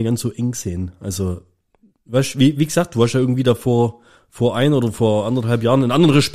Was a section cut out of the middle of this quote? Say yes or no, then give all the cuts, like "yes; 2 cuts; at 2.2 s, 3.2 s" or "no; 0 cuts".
no; 0 cuts